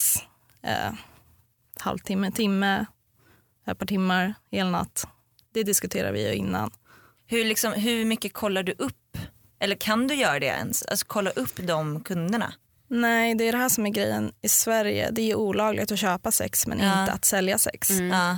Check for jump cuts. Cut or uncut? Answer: uncut